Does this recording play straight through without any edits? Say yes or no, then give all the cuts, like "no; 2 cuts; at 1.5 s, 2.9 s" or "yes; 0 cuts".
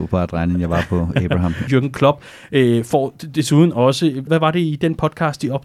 no; 2 cuts; at 1.7 s, 4.3 s